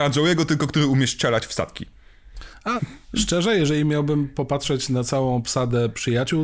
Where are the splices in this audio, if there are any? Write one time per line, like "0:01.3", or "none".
0:02.8